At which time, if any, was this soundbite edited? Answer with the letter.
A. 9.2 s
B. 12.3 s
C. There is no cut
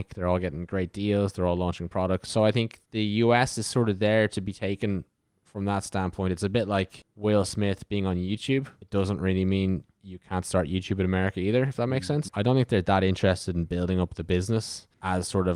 B